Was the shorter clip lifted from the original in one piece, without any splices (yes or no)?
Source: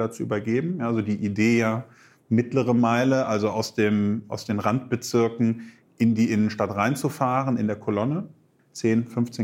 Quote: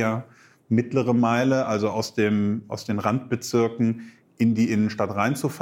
yes